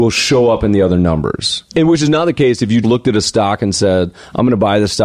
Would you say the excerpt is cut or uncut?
cut